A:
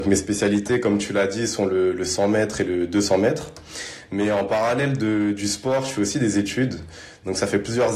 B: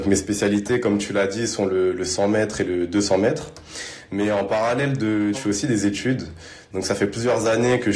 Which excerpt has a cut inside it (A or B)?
B